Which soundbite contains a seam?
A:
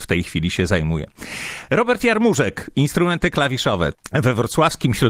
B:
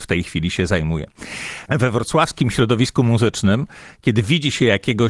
B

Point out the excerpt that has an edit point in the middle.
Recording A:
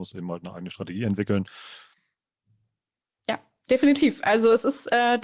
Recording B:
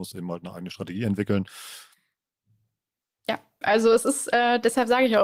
B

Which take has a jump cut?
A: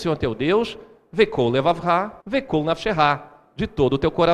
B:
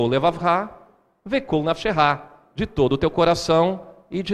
A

